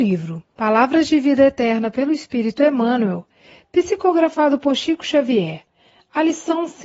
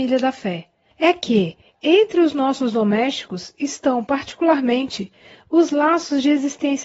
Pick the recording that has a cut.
second; 1 cut; at 0.9 s

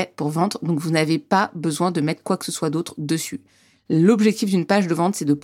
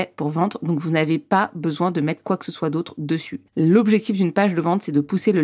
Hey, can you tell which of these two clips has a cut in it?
second; 1 cut; at 3.5 s

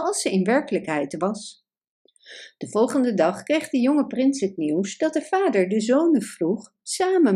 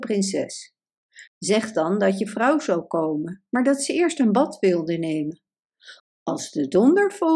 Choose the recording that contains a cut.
second; 2 cuts; at 1.3 s, 6.0 s

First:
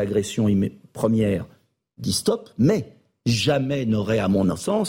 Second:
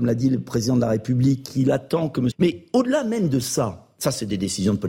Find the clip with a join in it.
second; 1 cut; at 2.3 s

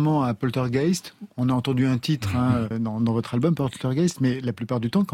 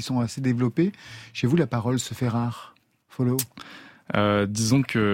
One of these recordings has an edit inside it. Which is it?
first; 1 cut; at 2.7 s

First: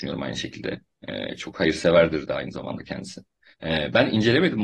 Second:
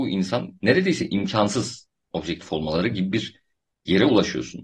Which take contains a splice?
first; 1 cut; at 3.5 s

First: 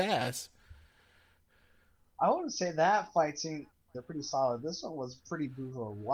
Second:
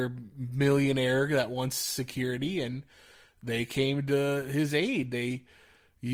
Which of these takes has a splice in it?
first; 1 cut; at 3.9 s

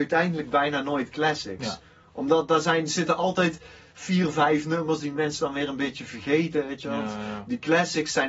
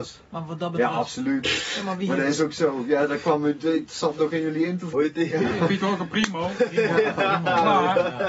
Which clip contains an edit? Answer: second; 1 cut; at 4.9 s

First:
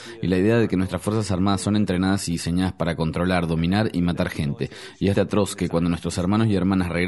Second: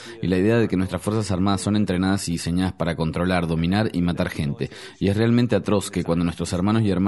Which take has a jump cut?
first; 1 cut; at 5.1 s

